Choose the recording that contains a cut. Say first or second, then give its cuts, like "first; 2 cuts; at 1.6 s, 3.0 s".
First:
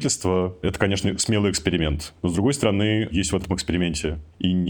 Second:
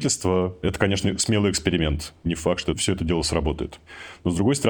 first; 1 cut; at 2.2 s